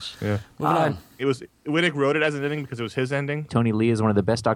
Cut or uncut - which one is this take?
cut